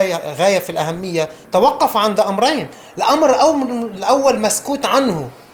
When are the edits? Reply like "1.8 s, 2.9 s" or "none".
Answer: none